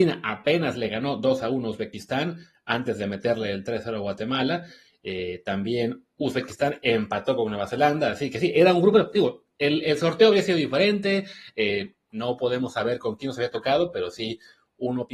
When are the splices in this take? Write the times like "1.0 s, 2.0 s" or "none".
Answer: none